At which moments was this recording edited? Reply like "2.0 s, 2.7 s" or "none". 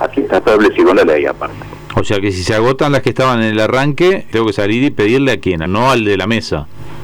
4.3 s, 5.6 s

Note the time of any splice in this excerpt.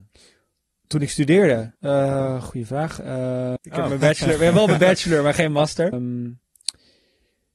1.8 s, 3.6 s, 5.9 s

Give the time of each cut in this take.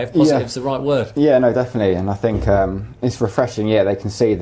none

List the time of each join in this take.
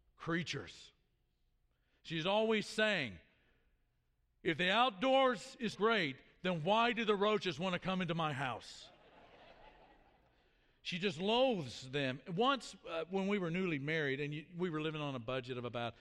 5.7 s

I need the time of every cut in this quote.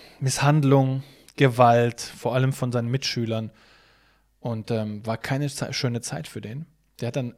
none

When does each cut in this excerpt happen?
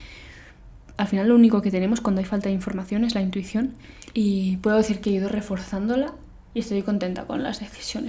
none

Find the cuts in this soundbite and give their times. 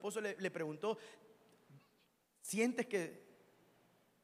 none

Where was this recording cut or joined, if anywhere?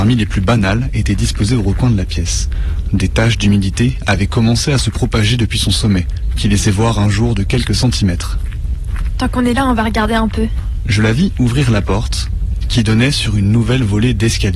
9.2 s

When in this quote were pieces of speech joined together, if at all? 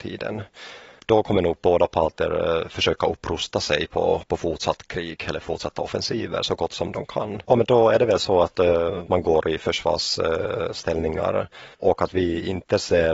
7.5 s, 11.7 s

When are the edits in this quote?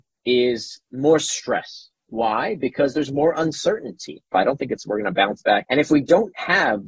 4.3 s, 5.6 s

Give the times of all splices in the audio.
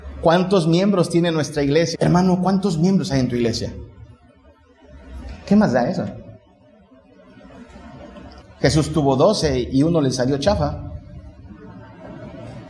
1.9 s, 8.4 s

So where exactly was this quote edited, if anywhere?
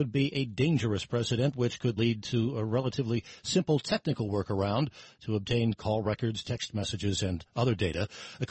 2.0 s, 6.4 s

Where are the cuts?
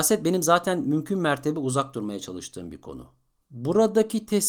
3.4 s

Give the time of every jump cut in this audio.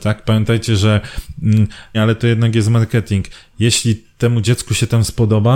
1.9 s

